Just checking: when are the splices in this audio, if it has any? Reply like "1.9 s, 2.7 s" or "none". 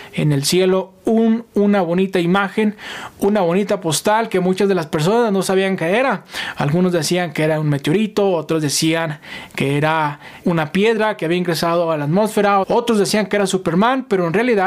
10.4 s, 12.6 s